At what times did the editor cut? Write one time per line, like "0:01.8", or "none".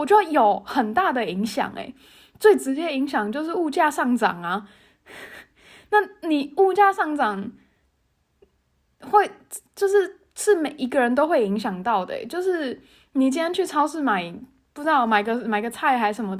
none